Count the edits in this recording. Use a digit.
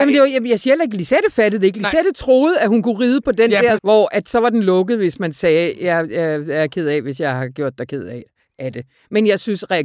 1